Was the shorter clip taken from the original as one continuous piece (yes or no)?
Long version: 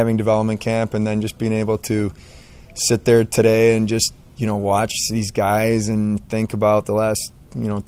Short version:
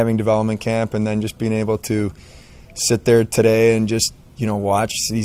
yes